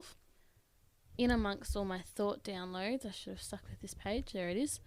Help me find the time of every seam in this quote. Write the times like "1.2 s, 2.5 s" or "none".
1.1 s